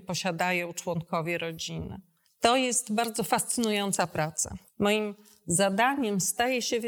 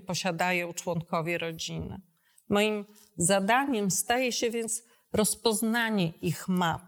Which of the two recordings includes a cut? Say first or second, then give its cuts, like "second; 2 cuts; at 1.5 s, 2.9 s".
first; 2 cuts; at 2.2 s, 4.7 s